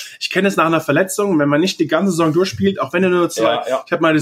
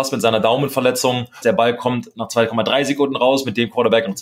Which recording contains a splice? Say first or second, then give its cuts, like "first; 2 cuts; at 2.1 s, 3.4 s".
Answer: second; 1 cut; at 1.4 s